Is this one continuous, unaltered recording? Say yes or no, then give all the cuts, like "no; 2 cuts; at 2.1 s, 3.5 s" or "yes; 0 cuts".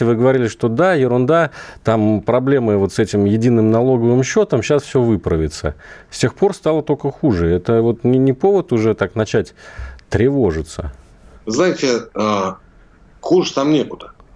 yes; 0 cuts